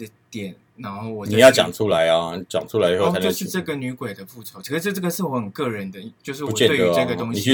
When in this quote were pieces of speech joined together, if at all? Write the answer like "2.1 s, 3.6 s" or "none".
none